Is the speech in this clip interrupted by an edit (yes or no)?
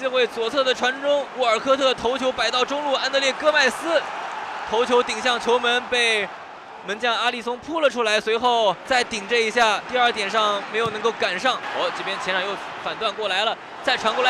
no